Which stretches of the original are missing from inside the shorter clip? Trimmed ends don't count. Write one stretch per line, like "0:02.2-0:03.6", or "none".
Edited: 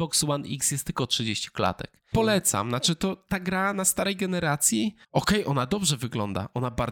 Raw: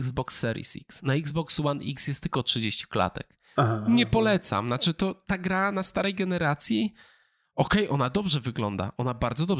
0:03.5-0:04.1
0:07.0-0:07.5